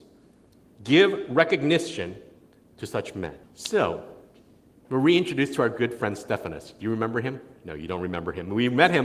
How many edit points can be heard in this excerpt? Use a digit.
1